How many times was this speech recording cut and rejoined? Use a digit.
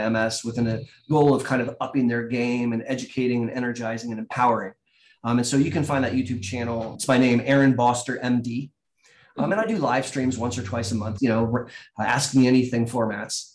1